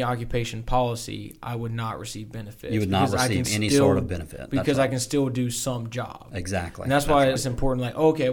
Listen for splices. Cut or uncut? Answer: cut